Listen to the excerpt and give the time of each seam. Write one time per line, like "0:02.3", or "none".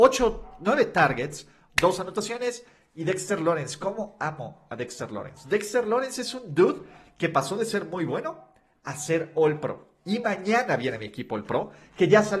0:01.7